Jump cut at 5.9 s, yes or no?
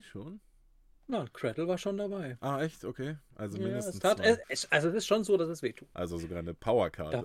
yes